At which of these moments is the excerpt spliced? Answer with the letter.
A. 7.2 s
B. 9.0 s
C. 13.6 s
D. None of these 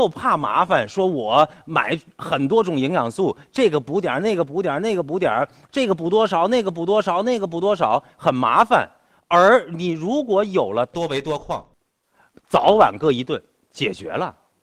D